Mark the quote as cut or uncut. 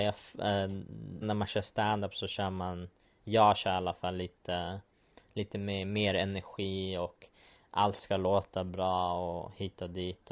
cut